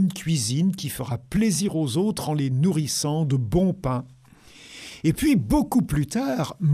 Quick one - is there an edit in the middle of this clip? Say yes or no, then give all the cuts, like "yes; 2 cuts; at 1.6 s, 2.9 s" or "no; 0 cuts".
no; 0 cuts